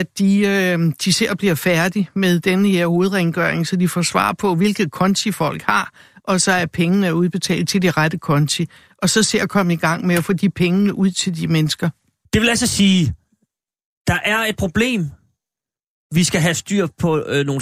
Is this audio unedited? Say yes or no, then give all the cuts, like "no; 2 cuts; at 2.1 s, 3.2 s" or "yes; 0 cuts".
no; 1 cut; at 12.3 s